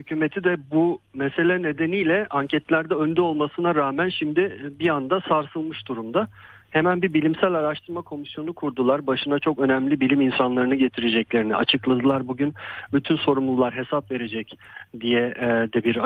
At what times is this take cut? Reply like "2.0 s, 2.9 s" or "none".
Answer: 6.6 s